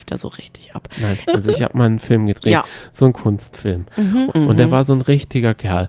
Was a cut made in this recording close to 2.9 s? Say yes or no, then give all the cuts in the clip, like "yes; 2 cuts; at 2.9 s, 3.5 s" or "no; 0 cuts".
no; 2 cuts; at 1.3 s, 4.3 s